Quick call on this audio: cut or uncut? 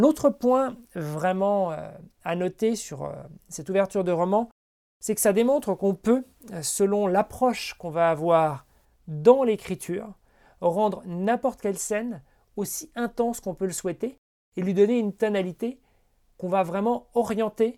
uncut